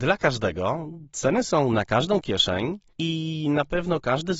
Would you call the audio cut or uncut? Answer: cut